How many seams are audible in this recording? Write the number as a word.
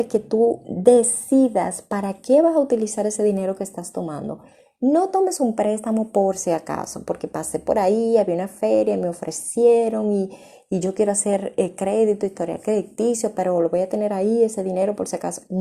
zero